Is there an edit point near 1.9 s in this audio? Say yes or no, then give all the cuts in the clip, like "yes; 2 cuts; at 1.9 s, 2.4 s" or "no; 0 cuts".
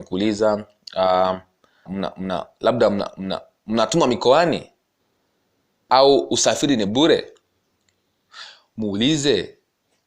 yes; 1 cut; at 1.9 s